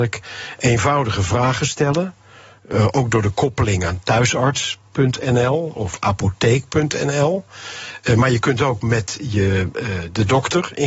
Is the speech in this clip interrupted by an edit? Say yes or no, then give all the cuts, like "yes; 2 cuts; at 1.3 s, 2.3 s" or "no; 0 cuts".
no; 0 cuts